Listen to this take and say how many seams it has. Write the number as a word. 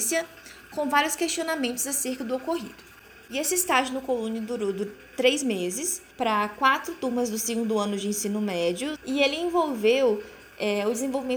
three